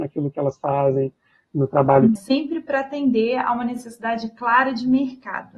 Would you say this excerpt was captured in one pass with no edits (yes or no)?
no